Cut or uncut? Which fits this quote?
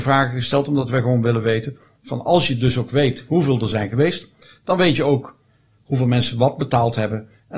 uncut